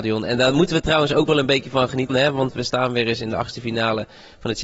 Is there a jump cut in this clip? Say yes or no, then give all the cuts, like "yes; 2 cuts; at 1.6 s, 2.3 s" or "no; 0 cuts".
yes; 1 cut; at 2.1 s